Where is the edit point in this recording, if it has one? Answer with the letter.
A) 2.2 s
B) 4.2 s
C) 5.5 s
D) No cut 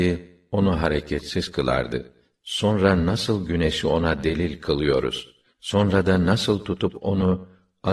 D